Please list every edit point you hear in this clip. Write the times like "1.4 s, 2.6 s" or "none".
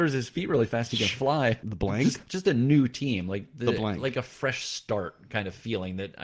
1.6 s

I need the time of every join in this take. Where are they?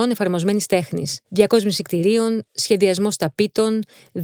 1.2 s

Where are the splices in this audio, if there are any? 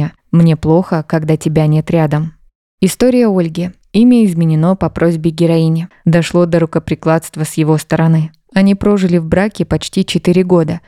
5.9 s, 8.5 s

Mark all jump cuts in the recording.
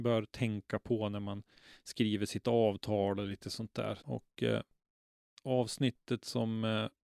4.0 s

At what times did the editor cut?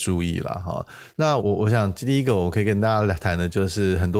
1.4 s

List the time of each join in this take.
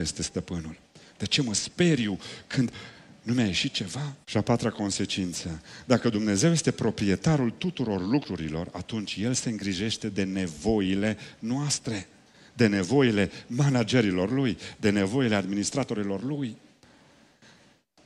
1.1 s, 4.2 s

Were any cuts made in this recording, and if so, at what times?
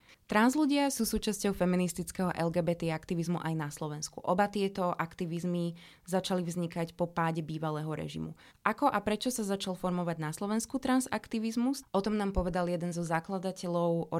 8.5 s, 11.8 s

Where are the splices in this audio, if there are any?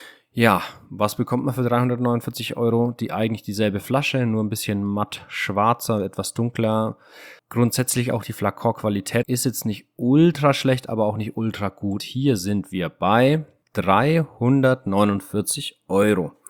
7.4 s, 9.2 s, 12.0 s

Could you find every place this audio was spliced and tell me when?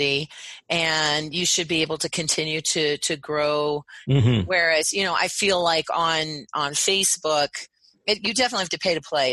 4.0 s

